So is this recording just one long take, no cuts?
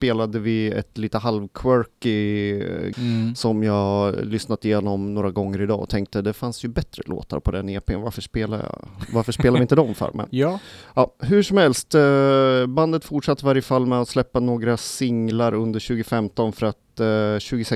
no; 1 cut; at 2.9 s

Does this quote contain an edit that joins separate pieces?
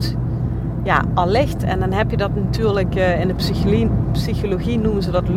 no; 0 cuts

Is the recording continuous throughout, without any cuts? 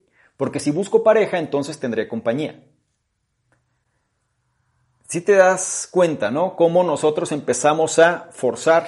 yes; 0 cuts

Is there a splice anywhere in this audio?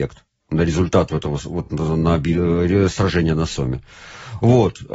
no; 0 cuts

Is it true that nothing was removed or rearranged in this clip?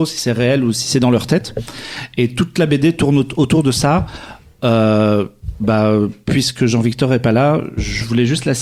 yes; 0 cuts

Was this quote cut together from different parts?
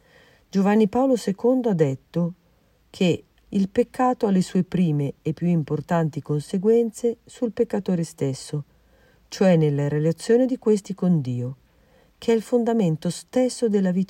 yes; 1 cut; at 3.4 s

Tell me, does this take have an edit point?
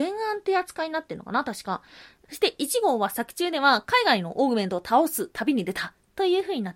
yes; 1 cut; at 2.3 s

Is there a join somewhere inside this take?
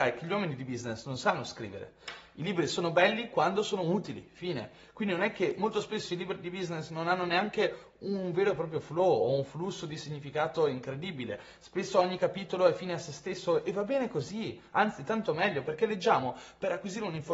no; 0 cuts

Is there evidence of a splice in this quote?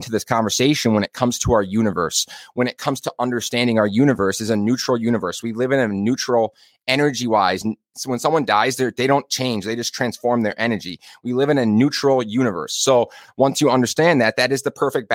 no; 0 cuts

